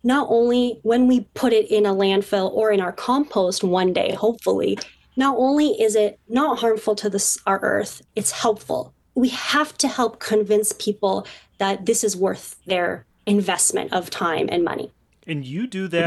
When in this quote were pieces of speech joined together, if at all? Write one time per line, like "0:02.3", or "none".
none